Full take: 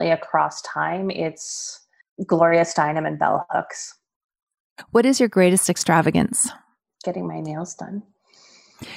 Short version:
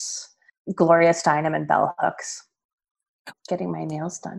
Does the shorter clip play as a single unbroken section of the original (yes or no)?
no